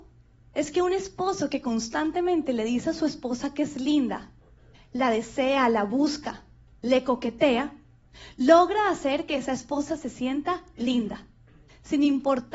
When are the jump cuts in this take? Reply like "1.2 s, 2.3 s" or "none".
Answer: none